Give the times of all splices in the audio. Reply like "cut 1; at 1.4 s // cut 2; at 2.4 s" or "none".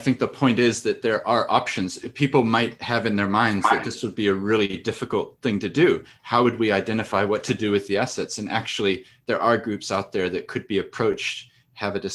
none